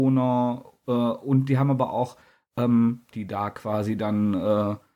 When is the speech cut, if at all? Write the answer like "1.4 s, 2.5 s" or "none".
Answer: 3.1 s